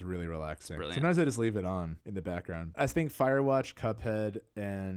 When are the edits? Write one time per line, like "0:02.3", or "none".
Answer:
0:02.7